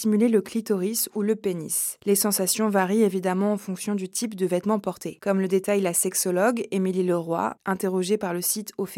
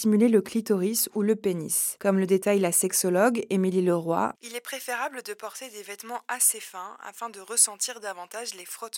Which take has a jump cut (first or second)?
second